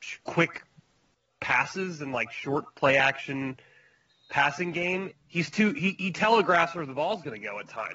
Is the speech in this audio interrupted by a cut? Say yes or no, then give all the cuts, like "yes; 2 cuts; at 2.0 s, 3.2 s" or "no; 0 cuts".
yes; 1 cut; at 5.1 s